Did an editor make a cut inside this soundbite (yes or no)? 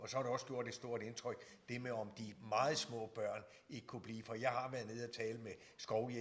no